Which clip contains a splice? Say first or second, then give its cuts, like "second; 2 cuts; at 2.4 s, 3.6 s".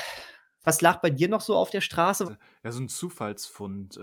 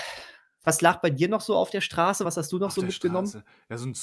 first; 1 cut; at 2.2 s